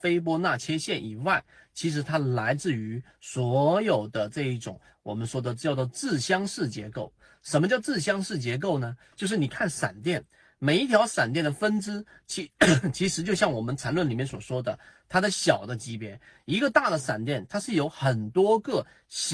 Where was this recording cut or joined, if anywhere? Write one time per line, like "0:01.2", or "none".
none